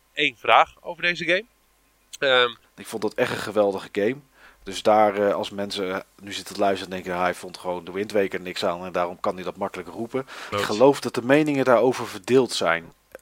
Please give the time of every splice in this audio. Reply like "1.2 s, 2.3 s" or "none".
2.6 s, 10.5 s

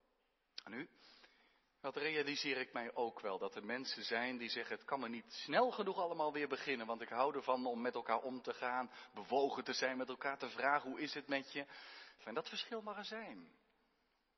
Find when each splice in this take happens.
12.2 s

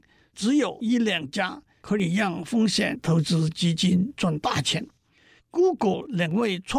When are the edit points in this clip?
5.4 s

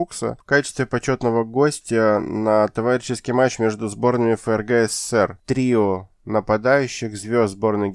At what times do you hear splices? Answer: 5.4 s

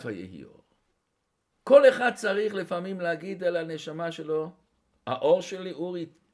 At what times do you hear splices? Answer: 1.5 s

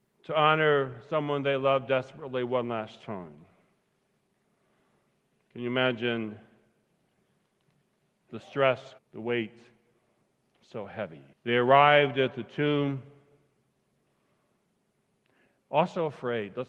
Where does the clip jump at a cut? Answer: 9.0 s, 11.3 s

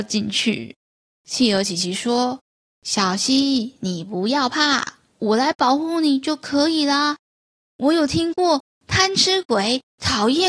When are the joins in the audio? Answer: none

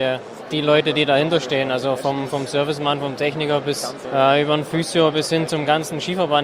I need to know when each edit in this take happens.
none

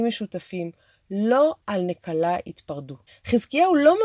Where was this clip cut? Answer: 3.1 s

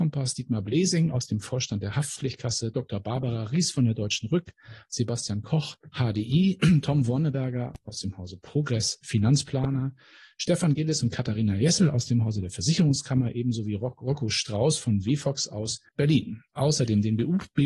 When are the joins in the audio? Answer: 15.9 s

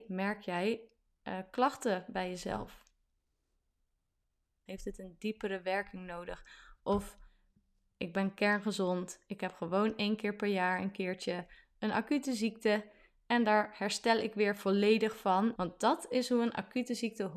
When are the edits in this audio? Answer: 4.7 s, 15.5 s

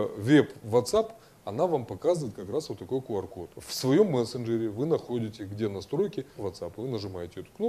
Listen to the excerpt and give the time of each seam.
3.5 s, 6.4 s

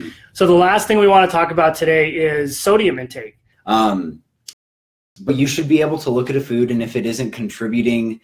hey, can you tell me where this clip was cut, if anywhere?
3.5 s, 5.3 s

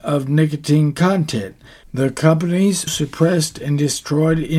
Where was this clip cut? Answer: 1.8 s, 2.9 s

